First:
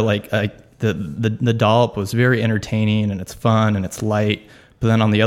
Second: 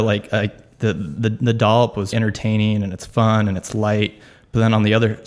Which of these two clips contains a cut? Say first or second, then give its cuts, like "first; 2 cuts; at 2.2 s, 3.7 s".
second; 1 cut; at 2.1 s